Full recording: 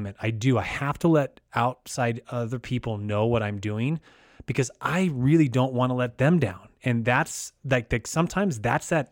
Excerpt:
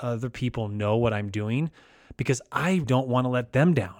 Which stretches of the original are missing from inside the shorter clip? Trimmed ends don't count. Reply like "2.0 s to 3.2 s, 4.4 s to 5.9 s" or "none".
5.1 s to 5.5 s